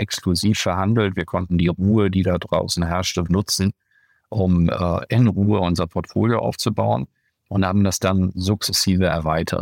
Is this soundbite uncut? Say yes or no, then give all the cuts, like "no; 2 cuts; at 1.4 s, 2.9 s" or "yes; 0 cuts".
no; 1 cut; at 3.3 s